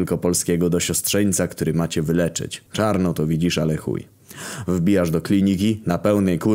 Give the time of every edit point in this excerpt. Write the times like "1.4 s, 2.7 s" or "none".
2.7 s